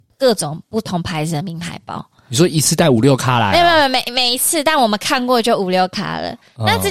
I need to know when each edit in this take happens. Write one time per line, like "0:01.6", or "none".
none